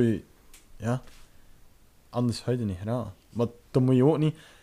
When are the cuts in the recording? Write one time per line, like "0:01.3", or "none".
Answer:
0:02.0